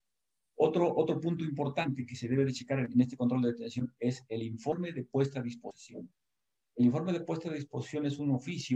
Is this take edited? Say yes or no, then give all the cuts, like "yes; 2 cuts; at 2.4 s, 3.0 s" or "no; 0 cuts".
no; 0 cuts